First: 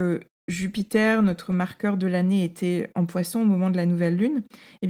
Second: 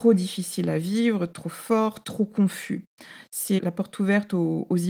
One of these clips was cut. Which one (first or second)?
second